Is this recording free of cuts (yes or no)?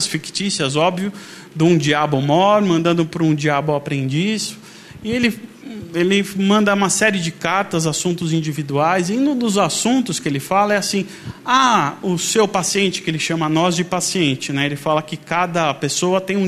yes